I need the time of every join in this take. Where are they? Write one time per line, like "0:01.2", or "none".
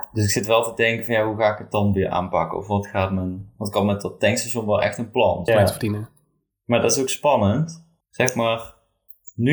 0:05.5
0:08.0